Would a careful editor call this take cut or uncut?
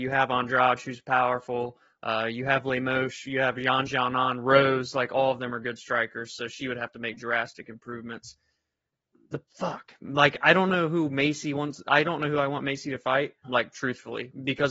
cut